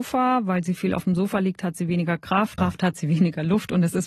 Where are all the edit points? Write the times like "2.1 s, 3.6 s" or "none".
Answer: 2.6 s